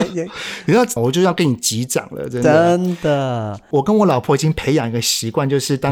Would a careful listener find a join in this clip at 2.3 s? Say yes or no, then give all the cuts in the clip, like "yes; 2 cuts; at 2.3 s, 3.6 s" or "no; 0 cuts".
no; 1 cut; at 1.0 s